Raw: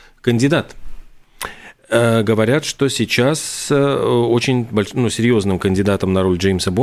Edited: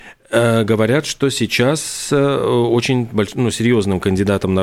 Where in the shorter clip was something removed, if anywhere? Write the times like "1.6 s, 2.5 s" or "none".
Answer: none